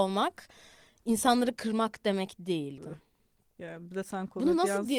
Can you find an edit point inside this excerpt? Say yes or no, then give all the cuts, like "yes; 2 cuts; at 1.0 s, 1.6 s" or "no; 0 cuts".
yes; 1 cut; at 2.8 s